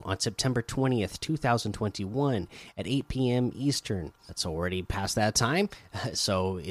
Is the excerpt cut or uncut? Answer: cut